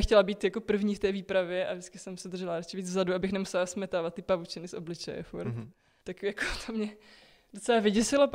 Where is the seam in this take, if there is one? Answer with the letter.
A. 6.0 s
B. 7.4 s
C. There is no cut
A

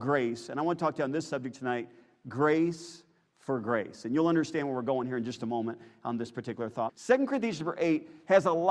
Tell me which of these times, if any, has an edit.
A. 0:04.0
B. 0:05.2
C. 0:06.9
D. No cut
C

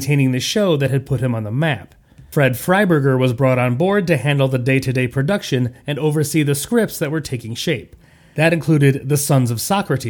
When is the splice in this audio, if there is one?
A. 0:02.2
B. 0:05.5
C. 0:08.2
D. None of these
D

